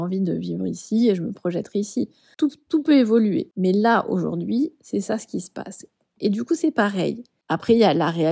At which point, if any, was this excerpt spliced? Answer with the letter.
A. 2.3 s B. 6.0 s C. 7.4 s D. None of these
C